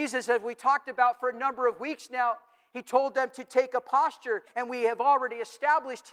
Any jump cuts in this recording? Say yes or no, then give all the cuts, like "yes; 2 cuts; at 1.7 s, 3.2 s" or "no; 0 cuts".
yes; 1 cut; at 4.5 s